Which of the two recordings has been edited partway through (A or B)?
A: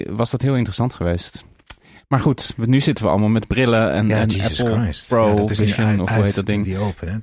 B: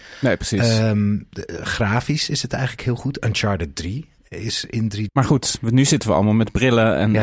B